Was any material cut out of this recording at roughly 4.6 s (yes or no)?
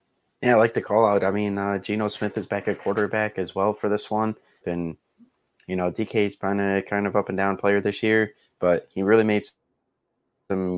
yes